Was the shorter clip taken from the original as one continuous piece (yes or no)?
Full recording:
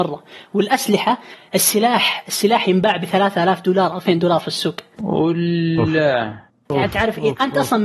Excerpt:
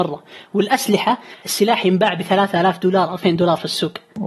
no